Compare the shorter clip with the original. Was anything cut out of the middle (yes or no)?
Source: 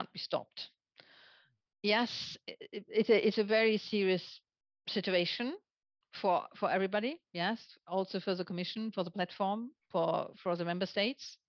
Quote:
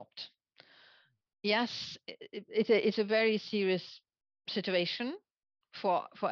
no